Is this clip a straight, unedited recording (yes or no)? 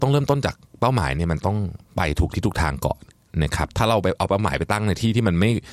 yes